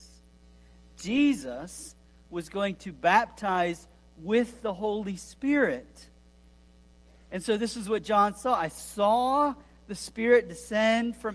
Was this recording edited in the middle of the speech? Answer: no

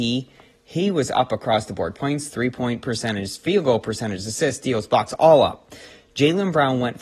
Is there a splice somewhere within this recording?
no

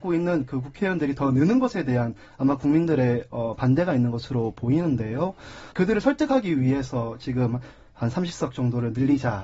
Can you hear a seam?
yes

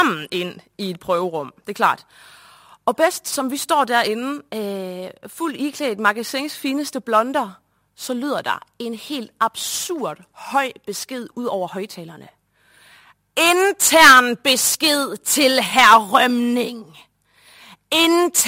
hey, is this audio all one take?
yes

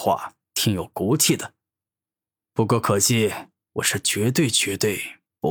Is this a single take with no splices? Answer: no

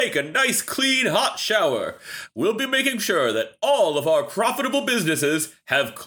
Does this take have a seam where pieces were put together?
no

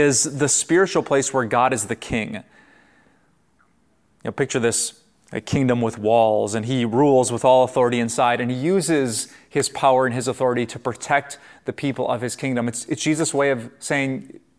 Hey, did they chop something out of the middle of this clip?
no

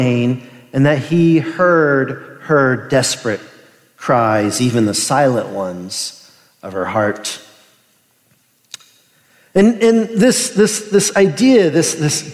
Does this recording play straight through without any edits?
yes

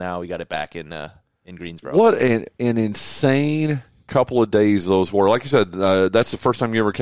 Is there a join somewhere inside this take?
no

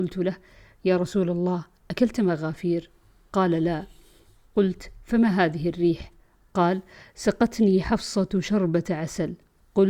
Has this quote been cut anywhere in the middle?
no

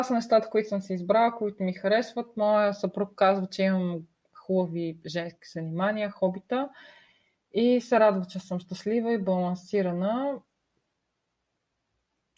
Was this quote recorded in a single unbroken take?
yes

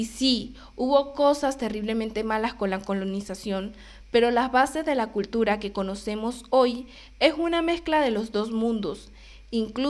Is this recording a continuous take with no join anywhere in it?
yes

